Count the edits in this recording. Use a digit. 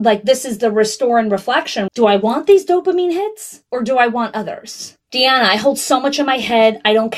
1